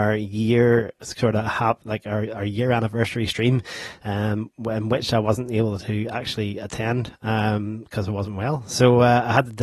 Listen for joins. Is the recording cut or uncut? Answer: uncut